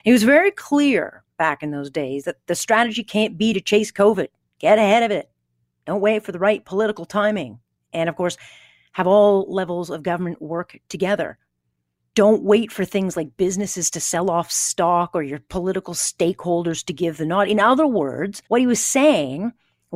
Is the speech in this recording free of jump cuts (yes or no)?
no